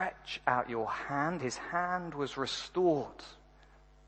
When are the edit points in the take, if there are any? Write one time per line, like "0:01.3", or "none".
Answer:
0:01.4

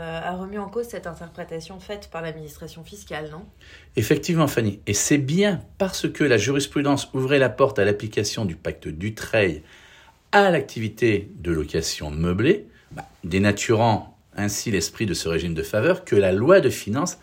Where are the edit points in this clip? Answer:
none

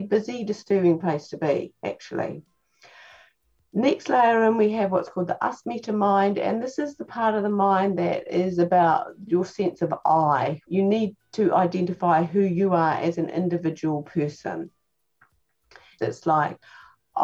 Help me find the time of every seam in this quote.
0:10.7
0:16.0

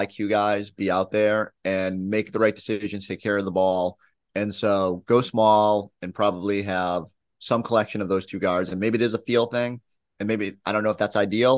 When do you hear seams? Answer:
none

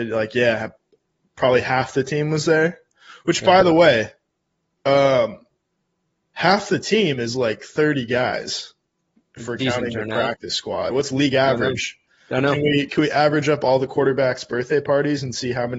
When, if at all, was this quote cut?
0:10.9

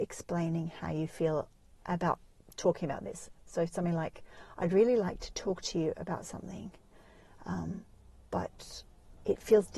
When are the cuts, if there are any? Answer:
none

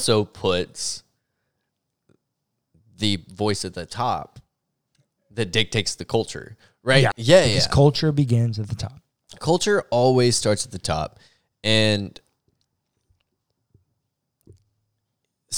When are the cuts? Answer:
0:07.1

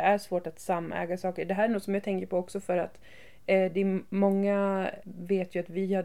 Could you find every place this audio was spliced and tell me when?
0:05.0

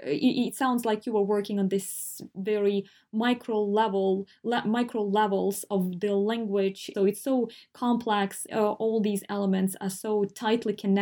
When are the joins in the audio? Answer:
0:06.9
0:08.5

